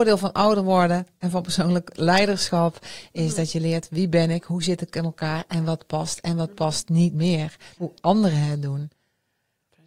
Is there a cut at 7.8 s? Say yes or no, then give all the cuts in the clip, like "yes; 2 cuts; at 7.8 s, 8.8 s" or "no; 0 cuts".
yes; 1 cut; at 7.8 s